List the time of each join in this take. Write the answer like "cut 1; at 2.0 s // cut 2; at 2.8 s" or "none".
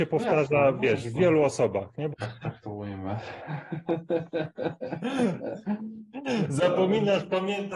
cut 1; at 2.1 s